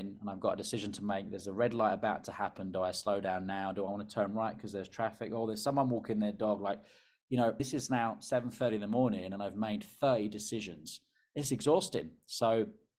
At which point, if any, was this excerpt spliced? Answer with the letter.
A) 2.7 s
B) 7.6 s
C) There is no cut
B